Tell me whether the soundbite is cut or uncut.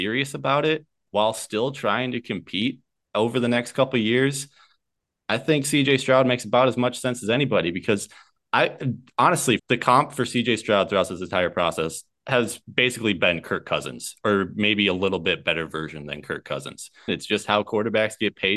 cut